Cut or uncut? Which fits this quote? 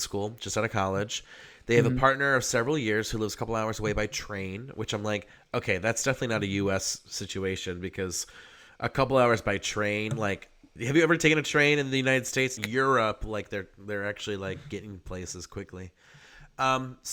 cut